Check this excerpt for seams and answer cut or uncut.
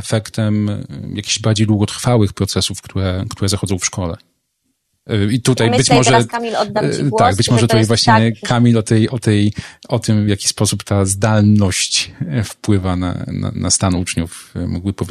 uncut